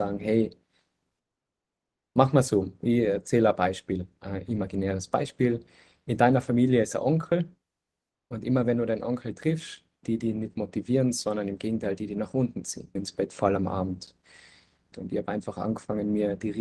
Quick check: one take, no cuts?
no; 3 cuts; at 10.0 s, 13.0 s, 14.9 s

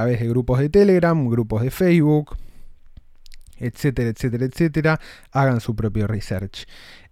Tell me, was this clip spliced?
no; 0 cuts

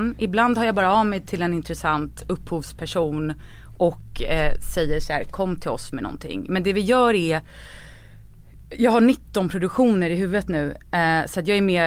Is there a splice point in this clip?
no; 0 cuts

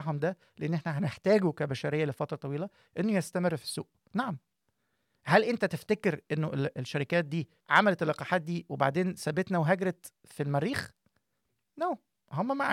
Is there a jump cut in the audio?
yes; 2 cuts; at 4.1 s, 7.6 s

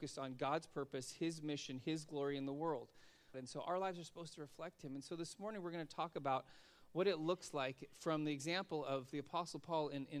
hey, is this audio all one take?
no; 1 cut; at 3.3 s

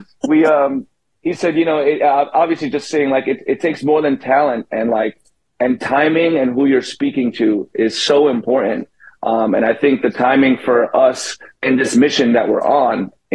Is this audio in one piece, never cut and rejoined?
yes; 0 cuts

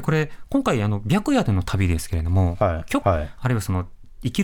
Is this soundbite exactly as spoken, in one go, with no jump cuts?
no; 1 cut; at 3.0 s

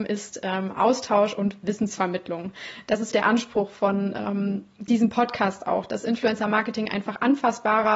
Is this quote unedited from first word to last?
no; 1 cut; at 3.1 s

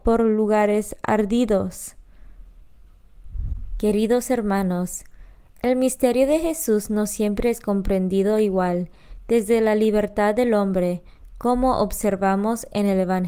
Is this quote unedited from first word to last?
no; 1 cut; at 3.8 s

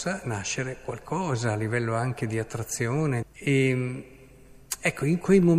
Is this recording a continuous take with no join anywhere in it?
no; 1 cut; at 3.2 s

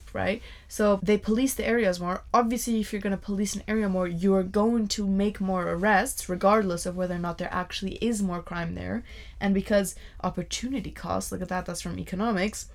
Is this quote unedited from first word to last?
no; 1 cut; at 1.0 s

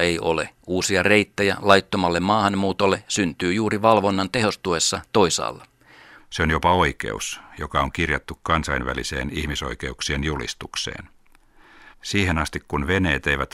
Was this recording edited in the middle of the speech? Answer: yes; 2 cuts; at 6.2 s, 11.9 s

